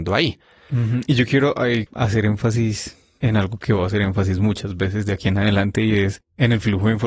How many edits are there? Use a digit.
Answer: 0